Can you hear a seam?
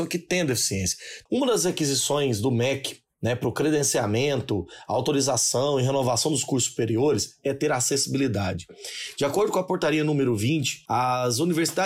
yes; 1 cut; at 1.2 s

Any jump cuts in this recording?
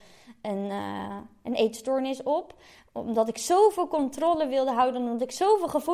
no; 0 cuts

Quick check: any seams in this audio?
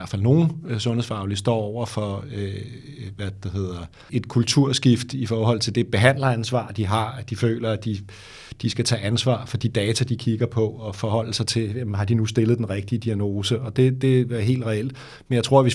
yes; 1 cut; at 4.1 s

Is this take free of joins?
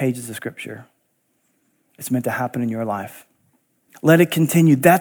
no; 1 cut; at 3.9 s

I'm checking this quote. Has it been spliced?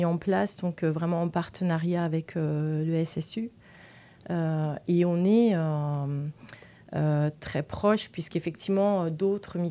no; 0 cuts

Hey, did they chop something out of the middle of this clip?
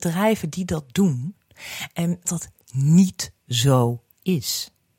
yes; 1 cut; at 2.2 s

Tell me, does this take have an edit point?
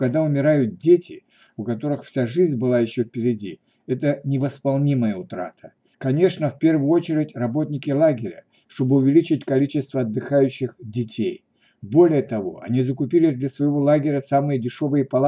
yes; 2 cuts; at 5.9 s, 8.6 s

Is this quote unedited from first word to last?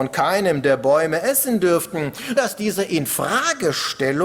no; 1 cut; at 2.4 s

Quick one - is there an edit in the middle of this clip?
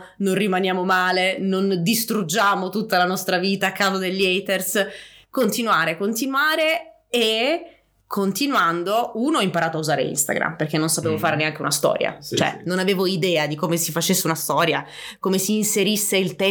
no; 0 cuts

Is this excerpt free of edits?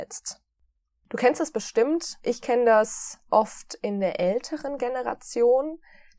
yes; 0 cuts

